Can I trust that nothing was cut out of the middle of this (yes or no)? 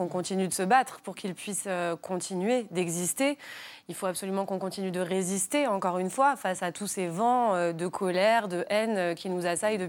yes